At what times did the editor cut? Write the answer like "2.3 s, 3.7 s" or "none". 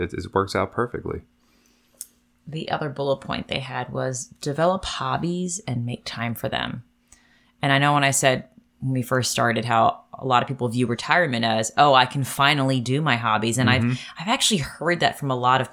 none